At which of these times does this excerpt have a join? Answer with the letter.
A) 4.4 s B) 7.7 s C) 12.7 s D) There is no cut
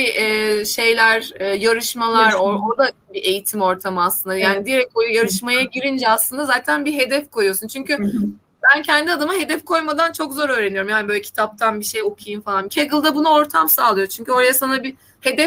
C